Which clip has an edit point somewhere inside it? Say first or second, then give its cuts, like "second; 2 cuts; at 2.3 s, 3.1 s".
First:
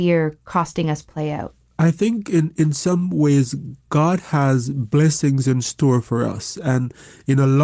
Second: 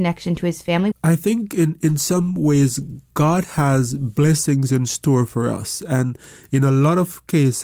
second; 1 cut; at 0.9 s